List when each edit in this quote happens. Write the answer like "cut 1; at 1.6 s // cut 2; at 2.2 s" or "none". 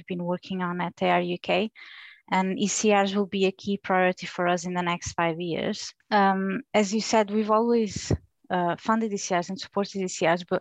cut 1; at 6.0 s